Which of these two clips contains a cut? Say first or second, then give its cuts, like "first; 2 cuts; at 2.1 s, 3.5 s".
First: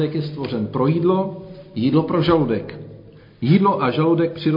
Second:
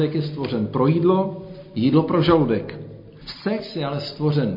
second; 1 cut; at 3.2 s